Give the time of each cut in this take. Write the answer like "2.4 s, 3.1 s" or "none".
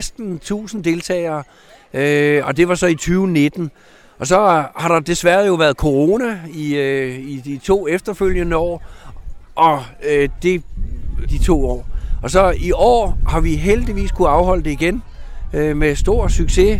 11.3 s